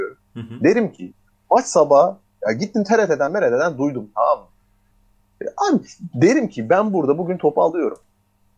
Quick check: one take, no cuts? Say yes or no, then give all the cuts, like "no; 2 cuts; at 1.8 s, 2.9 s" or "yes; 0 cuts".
yes; 0 cuts